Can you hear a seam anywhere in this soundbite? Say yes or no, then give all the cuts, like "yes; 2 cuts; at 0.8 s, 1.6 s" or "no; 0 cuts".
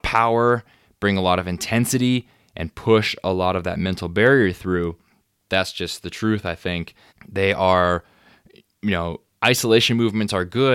yes; 2 cuts; at 5.5 s, 7.1 s